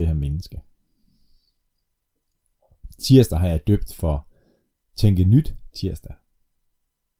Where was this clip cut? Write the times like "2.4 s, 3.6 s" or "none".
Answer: none